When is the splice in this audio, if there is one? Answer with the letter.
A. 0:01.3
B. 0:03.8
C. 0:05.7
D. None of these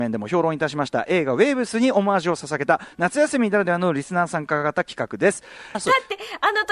C